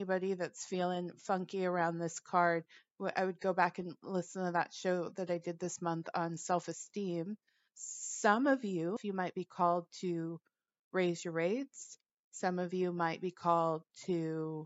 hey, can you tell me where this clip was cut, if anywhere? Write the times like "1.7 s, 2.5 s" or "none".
7.7 s, 9.0 s